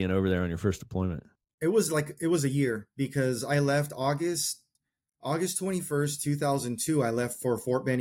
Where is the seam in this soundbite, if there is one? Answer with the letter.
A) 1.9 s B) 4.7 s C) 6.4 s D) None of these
D